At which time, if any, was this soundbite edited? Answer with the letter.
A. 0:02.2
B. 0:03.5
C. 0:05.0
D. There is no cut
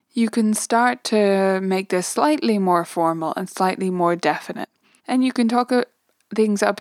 C